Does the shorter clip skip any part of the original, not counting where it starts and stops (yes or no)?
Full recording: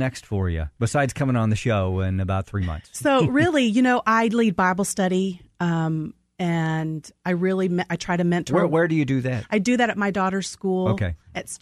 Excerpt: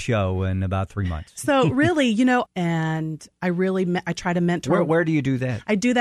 yes